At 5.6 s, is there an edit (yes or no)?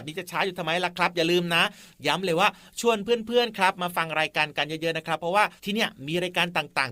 yes